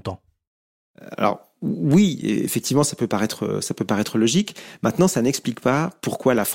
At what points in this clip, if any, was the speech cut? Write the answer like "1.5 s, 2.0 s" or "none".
none